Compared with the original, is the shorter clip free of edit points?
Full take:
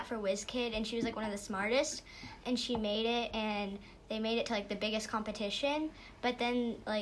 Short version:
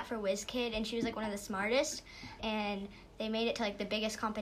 no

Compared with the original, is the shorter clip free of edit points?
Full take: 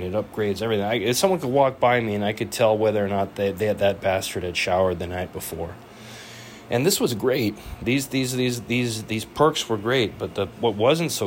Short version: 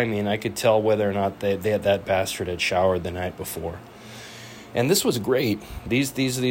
yes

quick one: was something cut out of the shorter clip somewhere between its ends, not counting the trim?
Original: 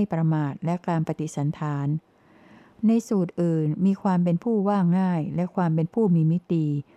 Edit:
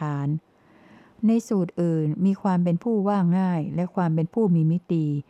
no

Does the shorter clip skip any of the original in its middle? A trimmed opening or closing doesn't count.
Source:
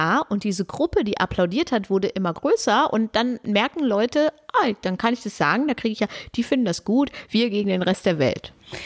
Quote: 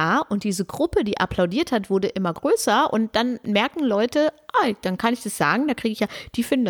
no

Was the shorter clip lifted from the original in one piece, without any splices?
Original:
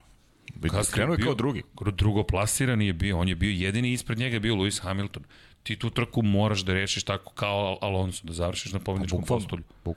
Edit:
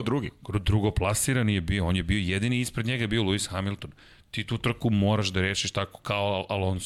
yes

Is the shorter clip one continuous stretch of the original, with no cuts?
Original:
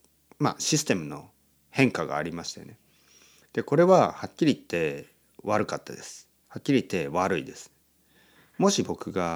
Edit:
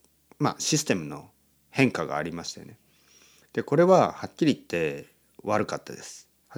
yes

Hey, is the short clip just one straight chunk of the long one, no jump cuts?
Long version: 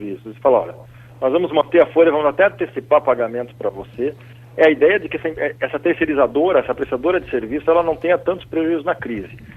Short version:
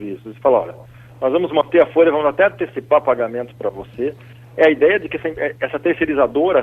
yes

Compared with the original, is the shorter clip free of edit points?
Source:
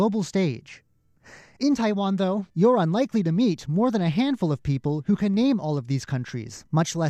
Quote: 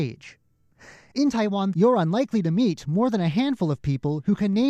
no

